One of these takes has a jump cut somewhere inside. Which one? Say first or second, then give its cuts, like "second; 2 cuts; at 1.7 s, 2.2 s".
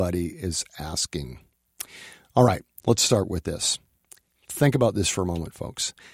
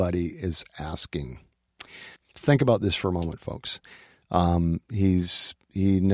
second; 2 cuts; at 2.2 s, 4.2 s